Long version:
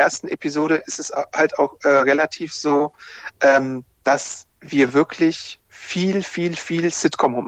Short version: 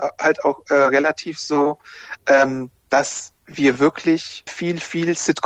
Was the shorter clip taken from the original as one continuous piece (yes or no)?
no